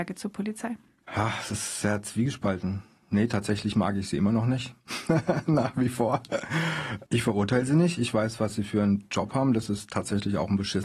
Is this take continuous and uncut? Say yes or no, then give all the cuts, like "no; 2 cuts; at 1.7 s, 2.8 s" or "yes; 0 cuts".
yes; 0 cuts